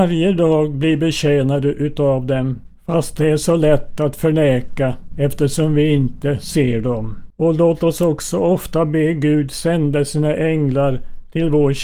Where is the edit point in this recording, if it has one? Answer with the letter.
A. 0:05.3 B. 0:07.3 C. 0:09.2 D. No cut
B